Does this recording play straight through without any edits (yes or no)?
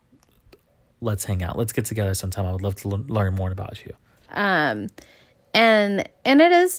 no